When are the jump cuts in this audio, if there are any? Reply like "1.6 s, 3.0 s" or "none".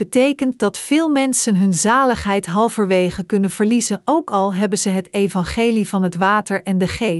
none